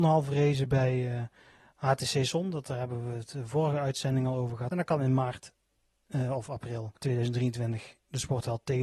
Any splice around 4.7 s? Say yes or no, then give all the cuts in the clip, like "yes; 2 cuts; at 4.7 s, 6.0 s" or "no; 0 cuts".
yes; 2 cuts; at 4.7 s, 7.0 s